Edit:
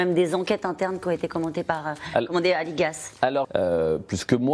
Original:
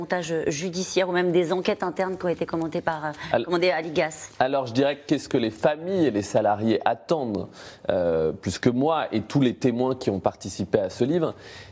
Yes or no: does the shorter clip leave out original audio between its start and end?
yes